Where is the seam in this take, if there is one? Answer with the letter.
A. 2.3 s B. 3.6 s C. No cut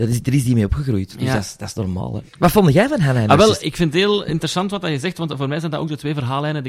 B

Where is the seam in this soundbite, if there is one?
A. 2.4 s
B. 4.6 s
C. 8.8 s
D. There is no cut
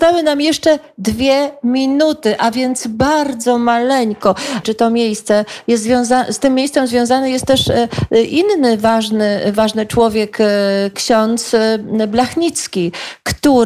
B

